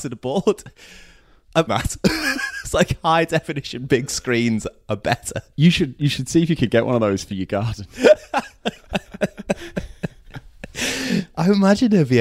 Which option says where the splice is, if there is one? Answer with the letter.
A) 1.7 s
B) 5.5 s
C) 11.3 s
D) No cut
A